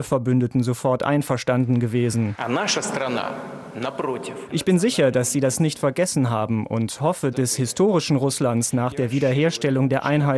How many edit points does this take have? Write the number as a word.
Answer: two